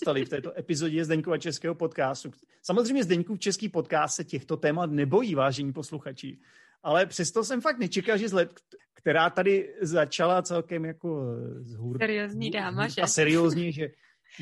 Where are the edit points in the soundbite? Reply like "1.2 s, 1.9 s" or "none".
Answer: 8.8 s